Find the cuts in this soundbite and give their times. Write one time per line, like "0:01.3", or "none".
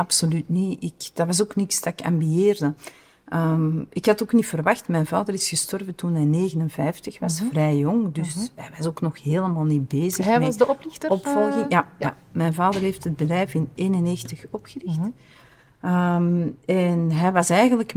none